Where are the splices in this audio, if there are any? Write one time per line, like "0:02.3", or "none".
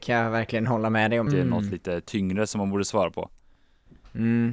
0:01.3